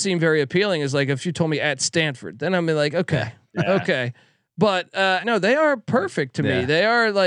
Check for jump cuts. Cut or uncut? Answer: cut